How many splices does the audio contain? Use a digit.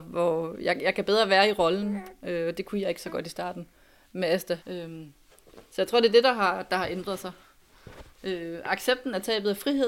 1